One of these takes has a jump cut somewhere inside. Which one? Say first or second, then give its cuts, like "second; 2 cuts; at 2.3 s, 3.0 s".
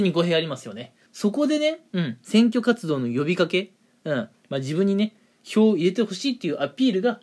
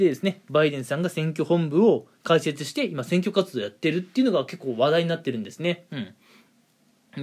first; 2 cuts; at 1.1 s, 4.3 s